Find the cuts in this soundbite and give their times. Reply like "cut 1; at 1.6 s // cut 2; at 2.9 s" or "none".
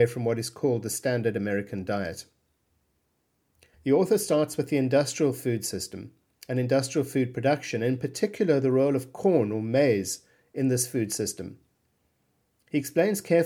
cut 1; at 3.7 s